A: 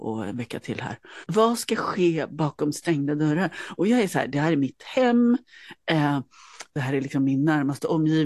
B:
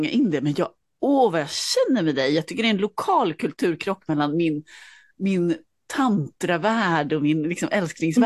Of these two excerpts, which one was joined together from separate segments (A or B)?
A